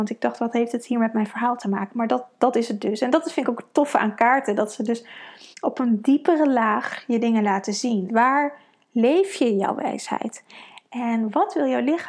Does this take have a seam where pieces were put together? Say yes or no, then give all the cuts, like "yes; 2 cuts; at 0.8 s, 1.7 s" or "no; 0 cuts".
yes; 2 cuts; at 5.5 s, 8.1 s